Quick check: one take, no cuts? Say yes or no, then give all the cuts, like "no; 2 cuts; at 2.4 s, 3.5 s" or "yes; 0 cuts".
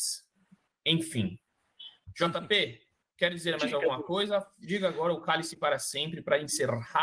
yes; 0 cuts